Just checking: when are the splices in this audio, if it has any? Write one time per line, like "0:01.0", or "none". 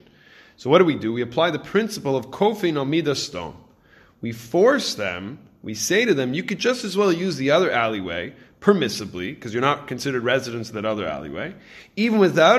none